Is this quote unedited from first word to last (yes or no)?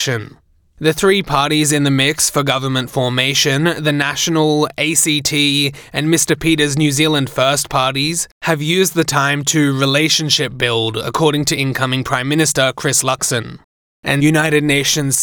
yes